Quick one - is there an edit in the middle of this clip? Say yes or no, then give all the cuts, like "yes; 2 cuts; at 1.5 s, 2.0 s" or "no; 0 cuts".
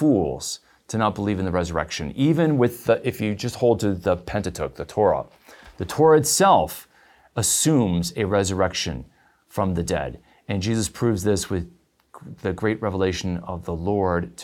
no; 0 cuts